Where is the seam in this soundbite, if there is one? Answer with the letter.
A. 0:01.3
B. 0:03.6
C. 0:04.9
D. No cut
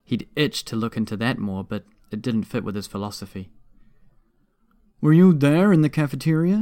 D